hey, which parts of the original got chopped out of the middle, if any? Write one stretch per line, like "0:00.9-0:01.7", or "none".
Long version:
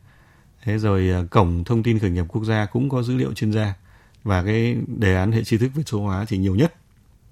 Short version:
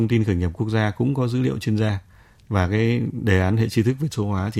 none